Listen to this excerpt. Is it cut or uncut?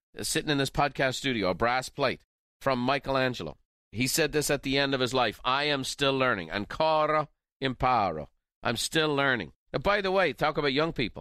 cut